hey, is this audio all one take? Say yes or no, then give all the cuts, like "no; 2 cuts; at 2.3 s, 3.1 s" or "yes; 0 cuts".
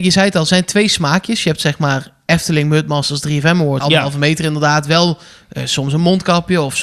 no; 1 cut; at 3.8 s